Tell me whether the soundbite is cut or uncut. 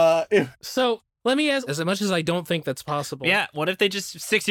cut